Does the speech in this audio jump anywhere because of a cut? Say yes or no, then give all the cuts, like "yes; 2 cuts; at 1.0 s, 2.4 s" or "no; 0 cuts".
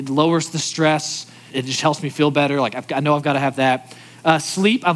yes; 1 cut; at 1.5 s